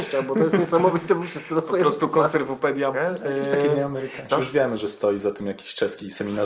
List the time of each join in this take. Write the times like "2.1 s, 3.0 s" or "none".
2.9 s, 4.3 s